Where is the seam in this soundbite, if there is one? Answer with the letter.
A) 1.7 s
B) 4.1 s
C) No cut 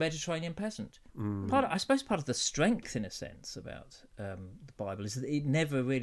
C